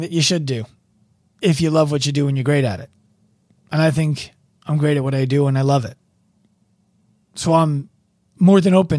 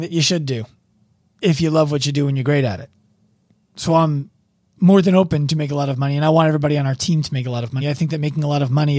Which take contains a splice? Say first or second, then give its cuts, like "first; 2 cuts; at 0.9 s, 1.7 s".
second; 2 cuts; at 3.5 s, 7.8 s